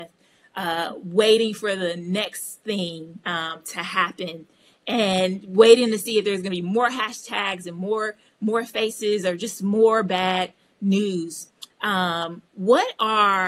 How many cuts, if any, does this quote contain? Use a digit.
1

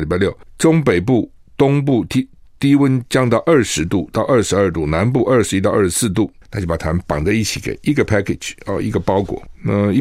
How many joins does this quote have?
1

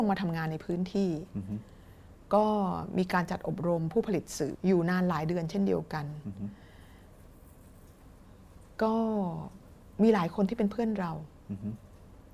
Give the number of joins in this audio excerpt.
1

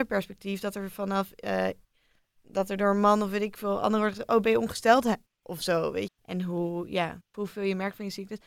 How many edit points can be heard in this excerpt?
2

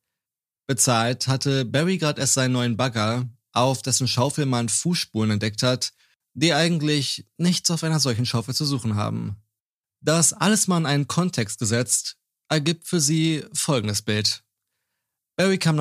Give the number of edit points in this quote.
1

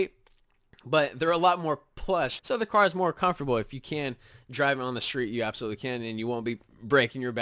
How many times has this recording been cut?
1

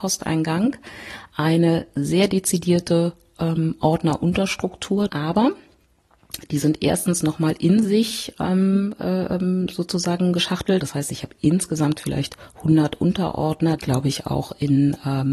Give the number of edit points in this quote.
3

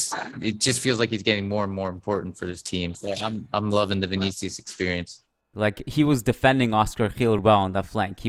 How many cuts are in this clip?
2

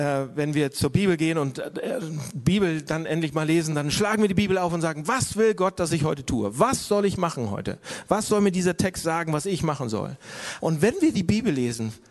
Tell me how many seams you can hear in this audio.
1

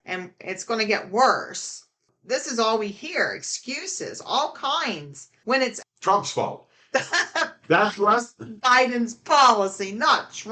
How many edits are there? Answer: 1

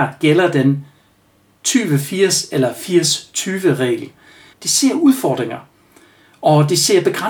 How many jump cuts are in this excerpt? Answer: 1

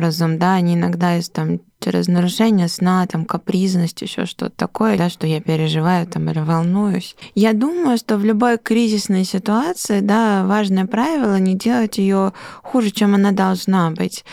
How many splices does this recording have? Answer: 1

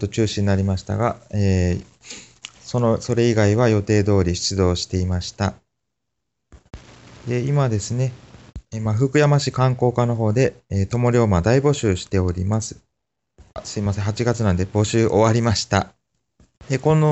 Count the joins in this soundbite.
0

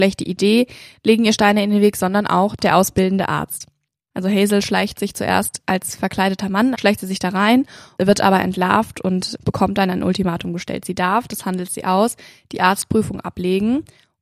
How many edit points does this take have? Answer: 1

